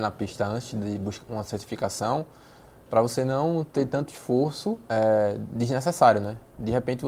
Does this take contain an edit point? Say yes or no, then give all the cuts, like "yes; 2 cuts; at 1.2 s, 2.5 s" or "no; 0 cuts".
yes; 2 cuts; at 1.2 s, 4.8 s